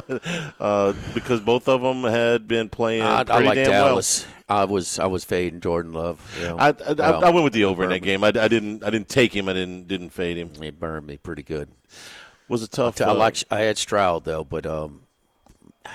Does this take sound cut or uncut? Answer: uncut